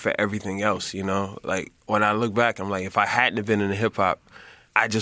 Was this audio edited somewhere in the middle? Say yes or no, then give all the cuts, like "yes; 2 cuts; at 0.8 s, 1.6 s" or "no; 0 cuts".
yes; 1 cut; at 1.8 s